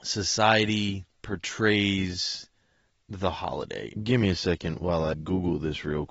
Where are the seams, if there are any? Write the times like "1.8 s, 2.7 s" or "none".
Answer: 4.0 s, 5.1 s